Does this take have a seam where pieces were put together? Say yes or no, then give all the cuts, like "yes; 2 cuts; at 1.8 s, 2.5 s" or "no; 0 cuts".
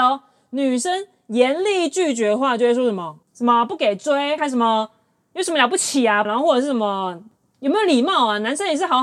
yes; 3 cuts; at 3.2 s, 4.4 s, 6.2 s